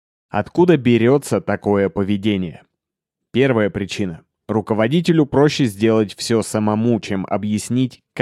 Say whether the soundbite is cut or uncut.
uncut